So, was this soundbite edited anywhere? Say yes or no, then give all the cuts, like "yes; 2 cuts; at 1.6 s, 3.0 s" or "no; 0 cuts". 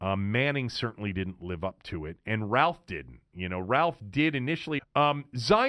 yes; 1 cut; at 4.8 s